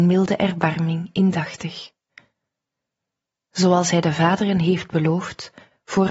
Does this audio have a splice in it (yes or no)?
no